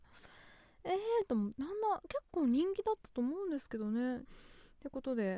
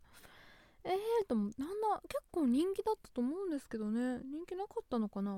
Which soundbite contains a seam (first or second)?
first